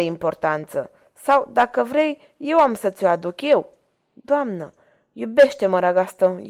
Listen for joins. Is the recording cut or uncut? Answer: uncut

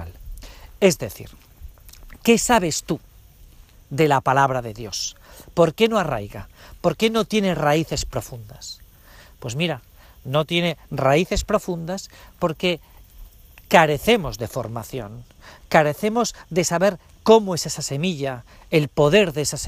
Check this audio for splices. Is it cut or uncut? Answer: uncut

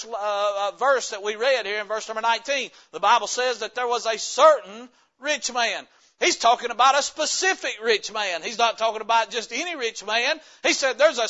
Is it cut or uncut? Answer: uncut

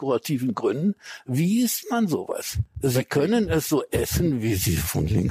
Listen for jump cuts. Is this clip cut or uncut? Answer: uncut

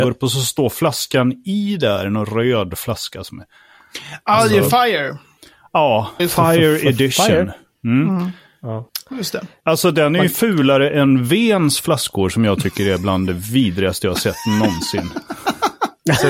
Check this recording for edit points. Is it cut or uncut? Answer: cut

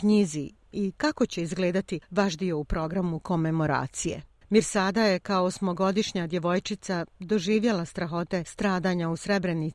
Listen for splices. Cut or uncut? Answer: cut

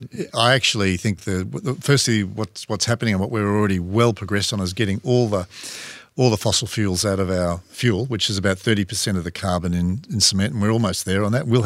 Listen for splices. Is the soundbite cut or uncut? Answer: uncut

